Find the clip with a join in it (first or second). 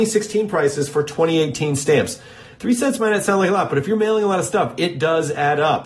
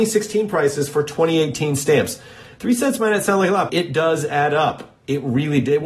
second